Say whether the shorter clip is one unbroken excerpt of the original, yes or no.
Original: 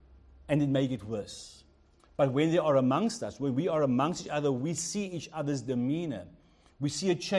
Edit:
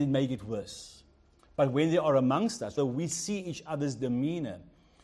no